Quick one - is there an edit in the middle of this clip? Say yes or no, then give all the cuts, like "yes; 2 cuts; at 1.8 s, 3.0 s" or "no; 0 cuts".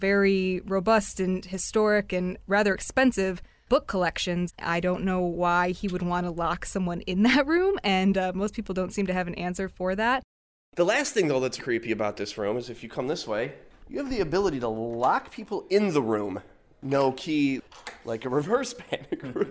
yes; 2 cuts; at 4.5 s, 11.6 s